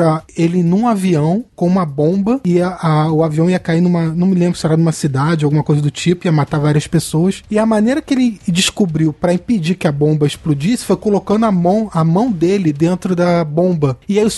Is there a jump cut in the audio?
no; 0 cuts

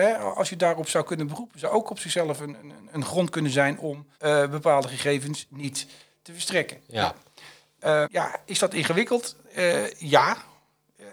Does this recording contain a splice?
yes; 2 cuts; at 4.1 s, 8.0 s

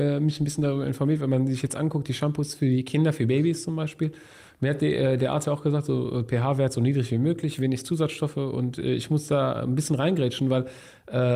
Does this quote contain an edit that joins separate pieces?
no; 0 cuts

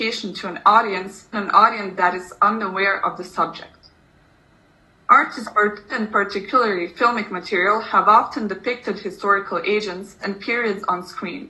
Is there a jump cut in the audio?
yes; 3 cuts; at 1.3 s, 5.9 s, 10.2 s

